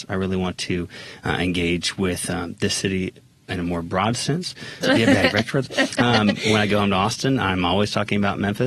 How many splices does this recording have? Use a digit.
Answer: 1